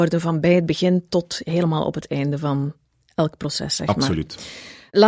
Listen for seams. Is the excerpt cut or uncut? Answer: uncut